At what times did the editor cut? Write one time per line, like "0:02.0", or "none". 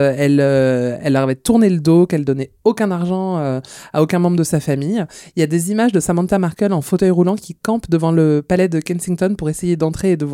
none